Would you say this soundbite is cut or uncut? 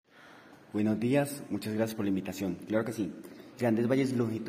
cut